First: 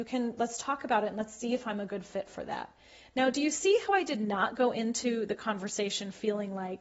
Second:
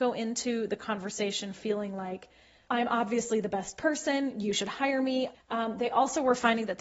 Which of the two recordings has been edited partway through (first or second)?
second